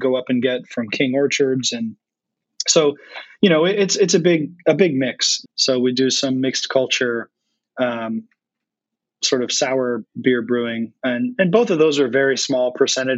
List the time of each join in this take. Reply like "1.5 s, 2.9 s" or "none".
5.4 s